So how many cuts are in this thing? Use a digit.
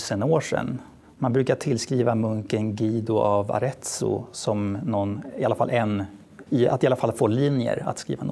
1